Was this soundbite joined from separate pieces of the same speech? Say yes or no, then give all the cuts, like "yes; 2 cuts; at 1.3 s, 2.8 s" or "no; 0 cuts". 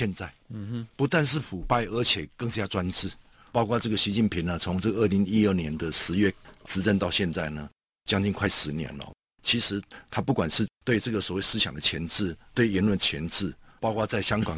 no; 0 cuts